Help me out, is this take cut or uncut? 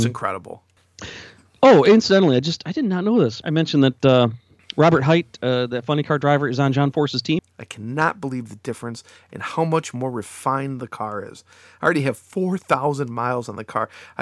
cut